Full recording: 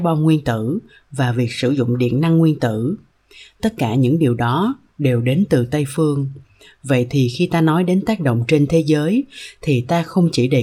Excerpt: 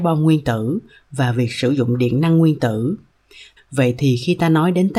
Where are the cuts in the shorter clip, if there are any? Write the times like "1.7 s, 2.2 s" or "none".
3.6 s